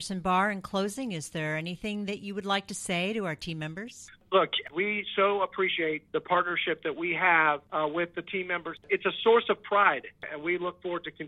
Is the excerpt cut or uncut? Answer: cut